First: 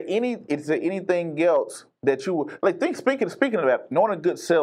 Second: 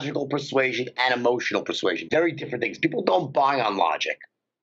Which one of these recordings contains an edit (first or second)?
second